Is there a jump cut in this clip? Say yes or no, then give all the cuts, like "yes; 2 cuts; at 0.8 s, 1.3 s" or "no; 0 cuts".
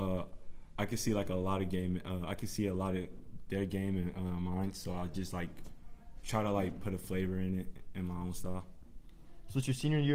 no; 0 cuts